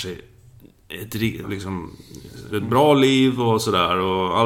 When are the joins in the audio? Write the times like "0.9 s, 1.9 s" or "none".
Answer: 1.4 s, 2.5 s